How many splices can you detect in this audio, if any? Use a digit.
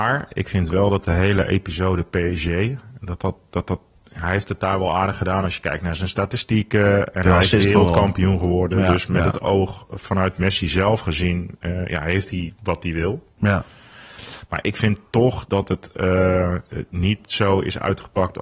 0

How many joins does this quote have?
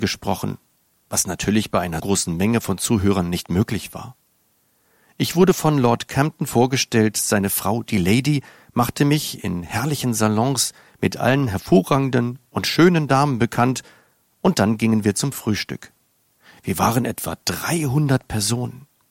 1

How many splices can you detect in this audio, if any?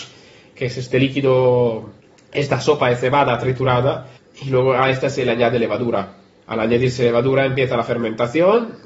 0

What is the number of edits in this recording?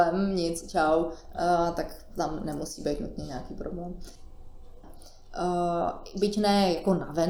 1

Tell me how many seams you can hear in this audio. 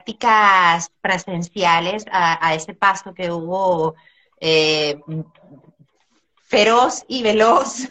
0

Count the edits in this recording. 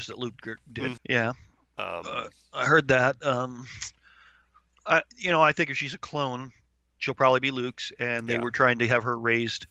1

